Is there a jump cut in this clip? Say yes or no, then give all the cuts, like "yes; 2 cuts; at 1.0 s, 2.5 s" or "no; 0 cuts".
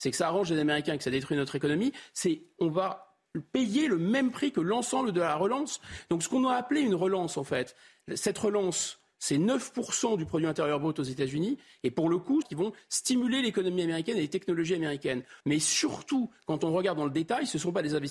yes; 2 cuts; at 12.4 s, 15.4 s